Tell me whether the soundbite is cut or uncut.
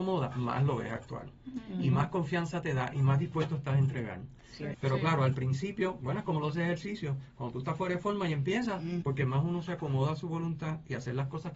cut